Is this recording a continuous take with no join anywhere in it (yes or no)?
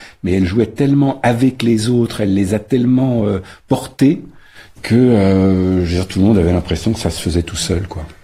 yes